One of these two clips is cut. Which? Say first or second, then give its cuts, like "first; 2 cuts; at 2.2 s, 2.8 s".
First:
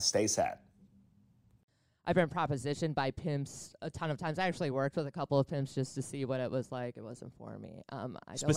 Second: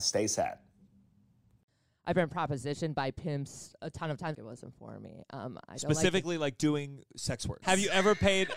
second; 2 cuts; at 4.3 s, 7.6 s